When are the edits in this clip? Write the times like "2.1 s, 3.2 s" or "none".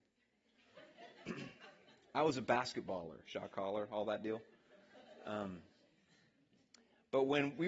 3.2 s